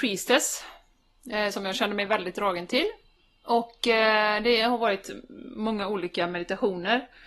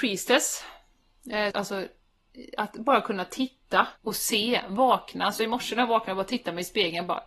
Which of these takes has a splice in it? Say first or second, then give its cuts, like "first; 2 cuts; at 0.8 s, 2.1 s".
second; 2 cuts; at 1.5 s, 4.0 s